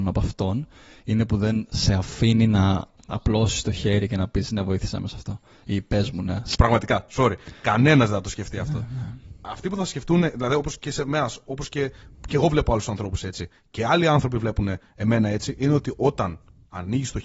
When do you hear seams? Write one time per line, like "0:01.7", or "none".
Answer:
0:06.5

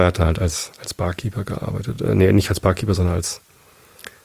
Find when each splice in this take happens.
none

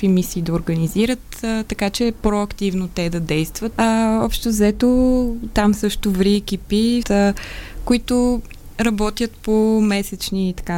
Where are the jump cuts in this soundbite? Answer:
0:03.7
0:07.0

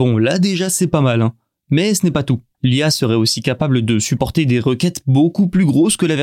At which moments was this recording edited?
0:02.5

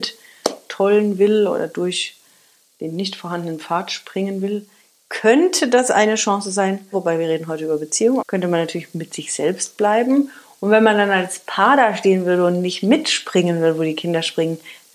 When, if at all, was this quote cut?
0:06.9
0:08.2

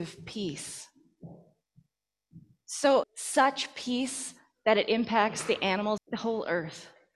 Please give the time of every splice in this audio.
0:03.0
0:06.0

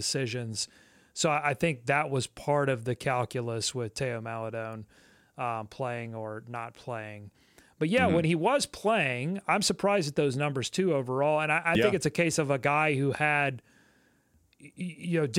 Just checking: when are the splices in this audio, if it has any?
none

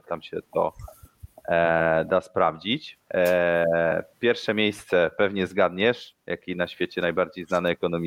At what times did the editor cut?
none

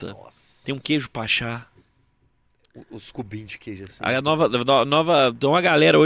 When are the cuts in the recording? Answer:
none

